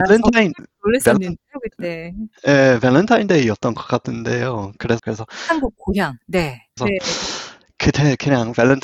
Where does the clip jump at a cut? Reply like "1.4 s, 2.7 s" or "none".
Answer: 5.0 s, 6.8 s